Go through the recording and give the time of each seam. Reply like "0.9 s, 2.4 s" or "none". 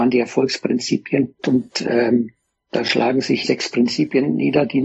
1.4 s, 3.4 s